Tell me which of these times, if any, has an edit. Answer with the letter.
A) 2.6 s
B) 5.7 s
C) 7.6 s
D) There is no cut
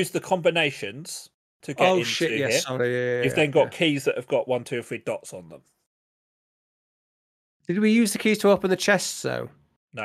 D